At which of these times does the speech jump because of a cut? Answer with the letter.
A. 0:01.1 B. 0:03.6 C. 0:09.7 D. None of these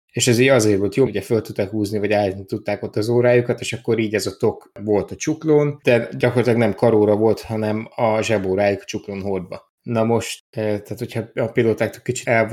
A